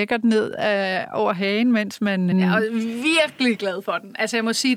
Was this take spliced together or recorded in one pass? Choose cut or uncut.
cut